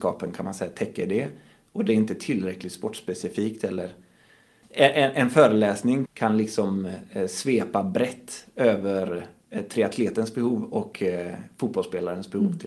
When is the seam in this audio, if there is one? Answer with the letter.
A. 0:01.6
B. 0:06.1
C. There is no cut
B